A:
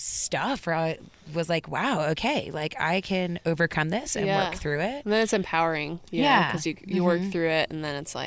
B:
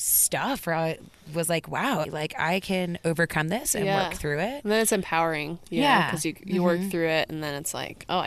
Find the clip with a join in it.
B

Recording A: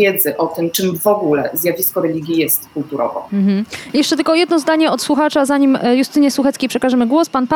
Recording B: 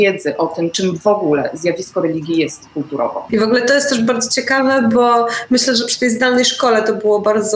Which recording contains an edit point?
B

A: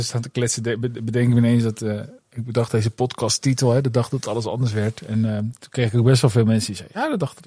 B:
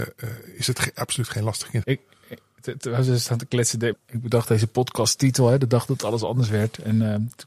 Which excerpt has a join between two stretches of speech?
B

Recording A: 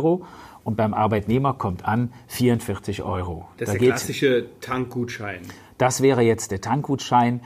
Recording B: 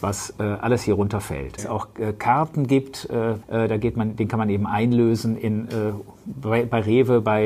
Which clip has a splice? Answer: B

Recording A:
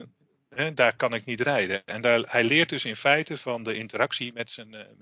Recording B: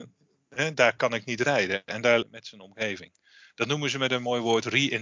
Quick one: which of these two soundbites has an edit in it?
B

